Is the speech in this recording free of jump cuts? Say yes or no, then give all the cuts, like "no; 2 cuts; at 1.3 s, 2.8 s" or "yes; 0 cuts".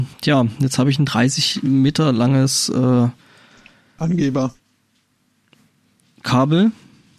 yes; 0 cuts